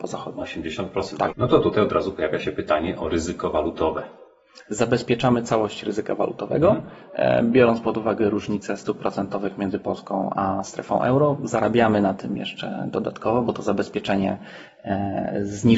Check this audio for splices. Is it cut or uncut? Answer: cut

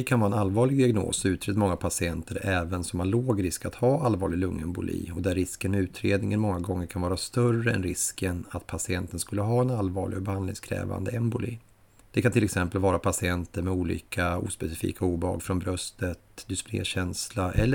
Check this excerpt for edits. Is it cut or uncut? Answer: uncut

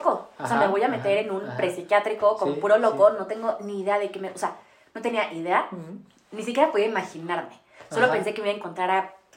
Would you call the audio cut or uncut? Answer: uncut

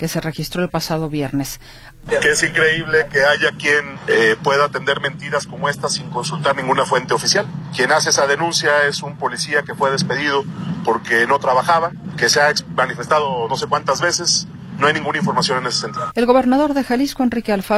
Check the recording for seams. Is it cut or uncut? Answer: cut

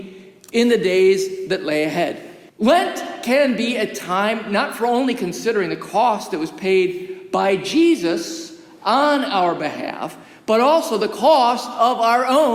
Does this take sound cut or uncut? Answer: cut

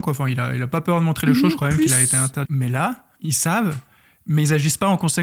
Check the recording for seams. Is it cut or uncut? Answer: cut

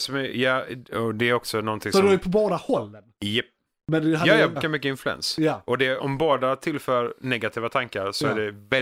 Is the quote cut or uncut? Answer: cut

